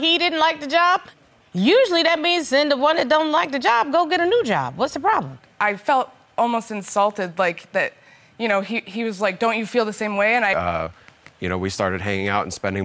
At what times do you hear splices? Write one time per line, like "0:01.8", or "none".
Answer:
0:10.5